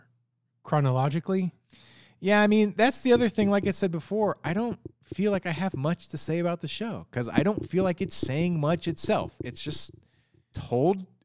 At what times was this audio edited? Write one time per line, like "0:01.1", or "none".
none